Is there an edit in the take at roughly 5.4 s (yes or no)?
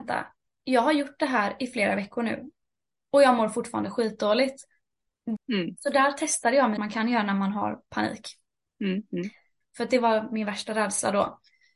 yes